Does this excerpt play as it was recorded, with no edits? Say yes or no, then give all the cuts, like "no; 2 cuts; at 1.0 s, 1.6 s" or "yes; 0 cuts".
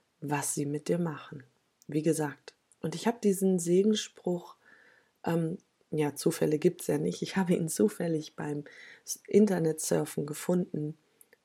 no; 1 cut; at 2.7 s